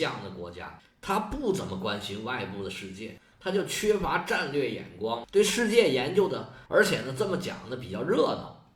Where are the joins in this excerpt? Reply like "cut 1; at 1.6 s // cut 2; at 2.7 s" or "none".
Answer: cut 1; at 3.3 s // cut 2; at 6.7 s